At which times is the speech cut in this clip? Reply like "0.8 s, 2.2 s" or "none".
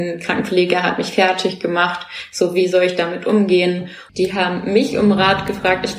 4.1 s